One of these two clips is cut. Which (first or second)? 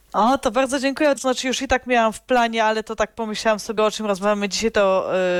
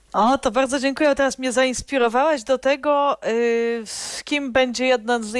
first